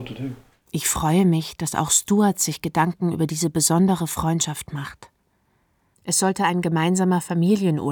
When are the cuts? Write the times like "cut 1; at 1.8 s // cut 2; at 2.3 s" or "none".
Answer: cut 1; at 5.9 s